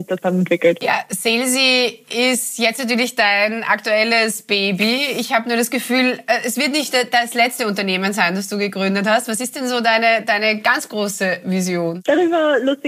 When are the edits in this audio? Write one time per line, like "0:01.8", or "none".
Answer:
none